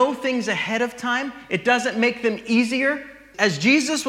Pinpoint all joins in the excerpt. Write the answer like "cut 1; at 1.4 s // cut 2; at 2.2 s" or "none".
none